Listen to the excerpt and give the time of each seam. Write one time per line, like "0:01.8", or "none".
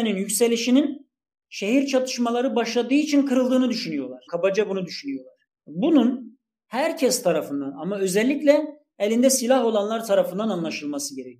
0:04.3
0:05.5